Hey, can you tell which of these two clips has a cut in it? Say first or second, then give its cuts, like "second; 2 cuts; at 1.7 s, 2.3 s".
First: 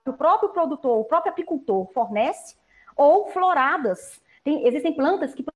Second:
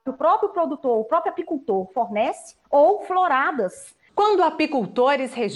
second; 2 cuts; at 2.6 s, 4.1 s